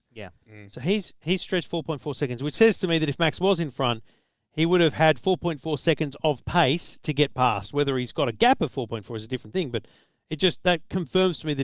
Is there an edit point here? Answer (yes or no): no